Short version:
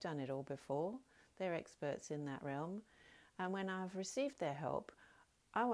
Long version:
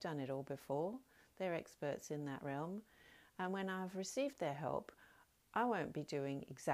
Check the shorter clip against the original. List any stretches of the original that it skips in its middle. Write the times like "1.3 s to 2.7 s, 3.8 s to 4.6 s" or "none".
none

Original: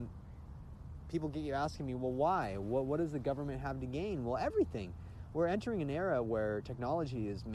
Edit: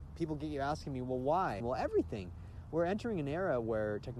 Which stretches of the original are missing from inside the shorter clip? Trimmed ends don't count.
2.5 s to 4.2 s

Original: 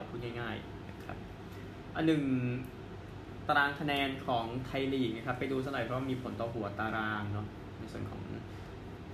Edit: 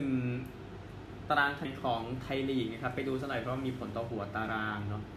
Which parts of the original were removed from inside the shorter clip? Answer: 3.8 s to 4.1 s

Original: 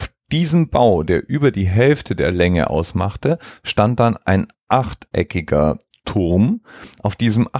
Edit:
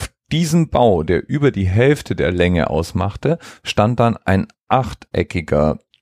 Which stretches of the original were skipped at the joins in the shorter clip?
none

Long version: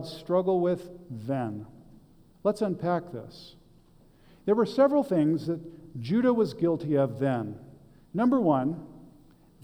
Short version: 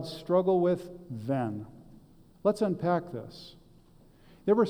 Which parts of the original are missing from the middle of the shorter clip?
none

